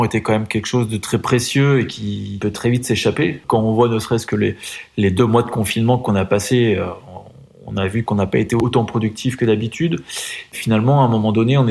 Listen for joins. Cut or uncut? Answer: uncut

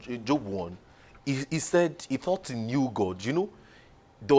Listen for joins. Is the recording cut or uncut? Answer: uncut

